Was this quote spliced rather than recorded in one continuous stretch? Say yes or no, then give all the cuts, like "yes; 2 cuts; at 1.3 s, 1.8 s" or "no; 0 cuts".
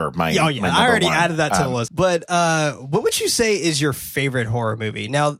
yes; 1 cut; at 1.9 s